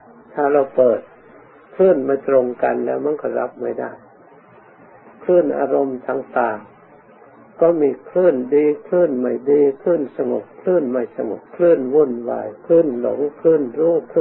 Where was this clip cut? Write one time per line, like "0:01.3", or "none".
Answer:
0:11.5